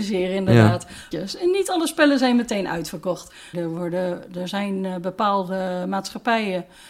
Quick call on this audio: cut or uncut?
cut